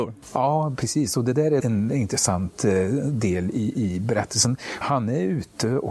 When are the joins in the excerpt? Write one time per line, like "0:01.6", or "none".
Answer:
0:01.6
0:04.8